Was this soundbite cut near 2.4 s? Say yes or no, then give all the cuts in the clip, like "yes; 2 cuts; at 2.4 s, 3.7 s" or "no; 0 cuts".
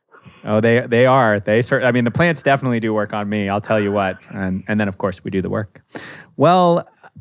no; 1 cut; at 4.2 s